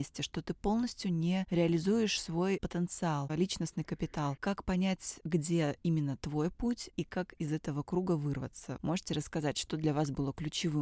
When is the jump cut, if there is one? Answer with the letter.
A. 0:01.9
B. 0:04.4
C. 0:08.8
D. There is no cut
C